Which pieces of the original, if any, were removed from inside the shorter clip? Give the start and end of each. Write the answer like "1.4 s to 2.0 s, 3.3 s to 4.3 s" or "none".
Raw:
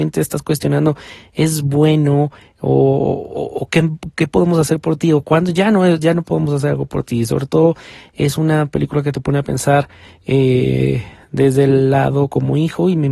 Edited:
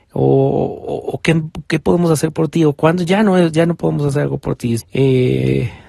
7.3 s to 10.1 s